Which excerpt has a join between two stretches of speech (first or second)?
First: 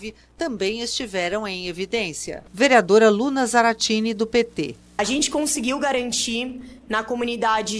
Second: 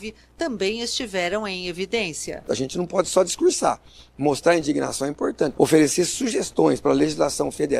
second